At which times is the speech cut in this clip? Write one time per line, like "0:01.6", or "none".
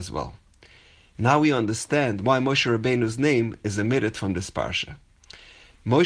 none